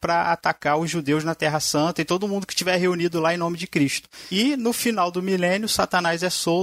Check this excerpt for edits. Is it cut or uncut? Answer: cut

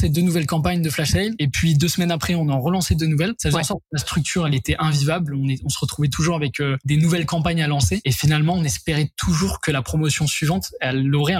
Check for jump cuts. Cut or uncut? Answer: uncut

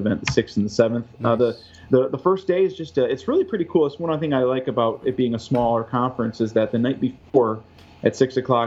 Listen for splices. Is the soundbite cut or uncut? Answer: uncut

